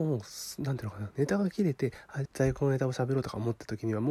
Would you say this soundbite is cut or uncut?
cut